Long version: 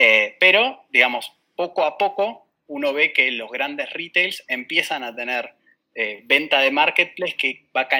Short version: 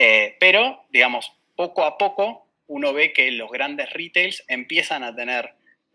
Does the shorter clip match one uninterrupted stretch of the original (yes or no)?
yes